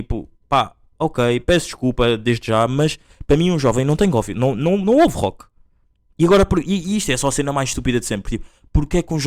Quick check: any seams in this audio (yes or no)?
no